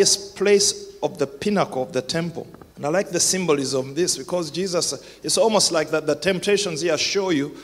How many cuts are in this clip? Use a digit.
1